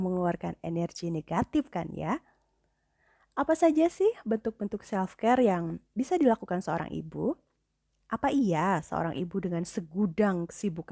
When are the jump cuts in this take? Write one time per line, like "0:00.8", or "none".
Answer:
none